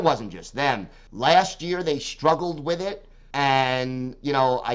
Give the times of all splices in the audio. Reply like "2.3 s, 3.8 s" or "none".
1.1 s, 3.3 s